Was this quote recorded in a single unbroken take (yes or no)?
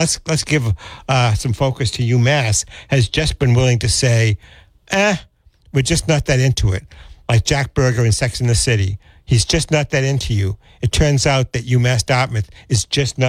yes